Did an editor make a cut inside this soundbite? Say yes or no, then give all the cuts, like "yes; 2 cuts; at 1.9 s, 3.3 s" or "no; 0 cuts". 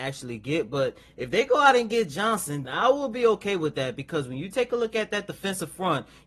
yes; 1 cut; at 2.6 s